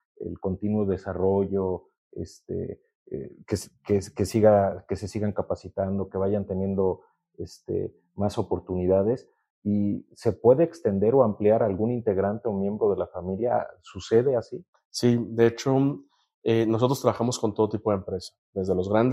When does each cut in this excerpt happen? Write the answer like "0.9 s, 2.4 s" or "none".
none